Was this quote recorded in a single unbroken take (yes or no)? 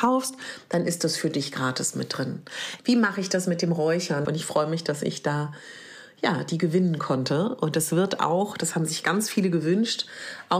no